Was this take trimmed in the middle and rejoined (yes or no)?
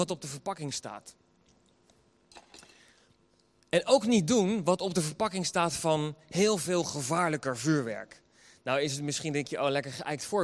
no